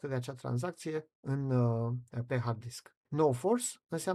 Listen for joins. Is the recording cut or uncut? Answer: cut